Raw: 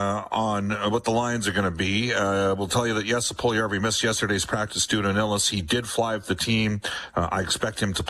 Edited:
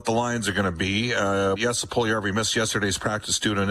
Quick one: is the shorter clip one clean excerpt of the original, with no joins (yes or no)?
no